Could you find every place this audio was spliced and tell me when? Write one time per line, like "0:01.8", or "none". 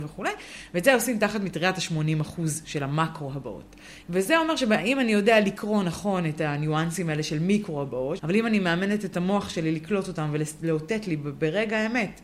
0:04.0
0:08.2